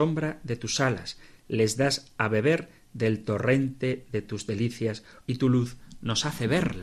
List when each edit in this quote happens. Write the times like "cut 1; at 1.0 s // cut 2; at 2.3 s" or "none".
cut 1; at 1.4 s // cut 2; at 5.2 s